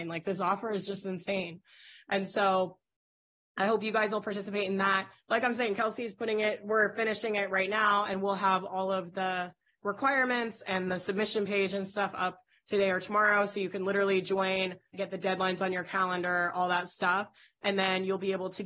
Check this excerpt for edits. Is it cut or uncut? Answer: cut